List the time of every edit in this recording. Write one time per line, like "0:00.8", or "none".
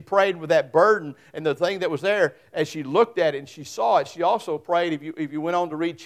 none